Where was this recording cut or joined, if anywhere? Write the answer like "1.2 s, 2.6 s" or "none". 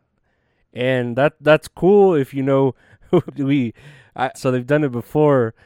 3.3 s, 4.3 s